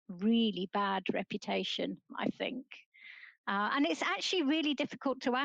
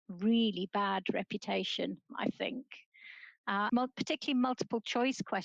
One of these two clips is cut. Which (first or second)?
second